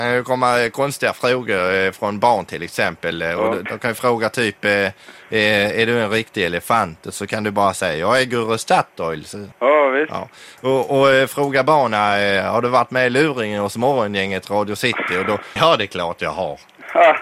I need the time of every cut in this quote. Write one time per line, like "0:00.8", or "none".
0:09.5
0:15.6